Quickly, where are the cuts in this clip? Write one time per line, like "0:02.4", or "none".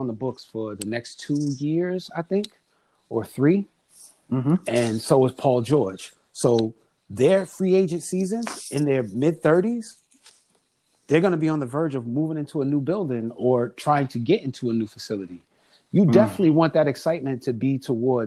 none